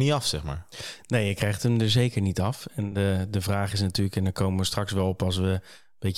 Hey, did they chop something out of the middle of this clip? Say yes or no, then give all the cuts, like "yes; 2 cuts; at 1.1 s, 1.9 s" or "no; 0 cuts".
no; 0 cuts